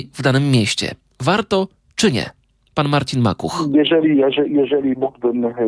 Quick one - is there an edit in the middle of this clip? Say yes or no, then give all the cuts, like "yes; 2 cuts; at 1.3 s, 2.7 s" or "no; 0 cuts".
no; 0 cuts